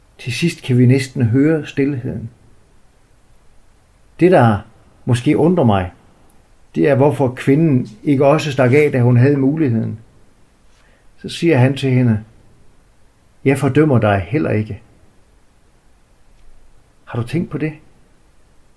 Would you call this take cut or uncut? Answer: cut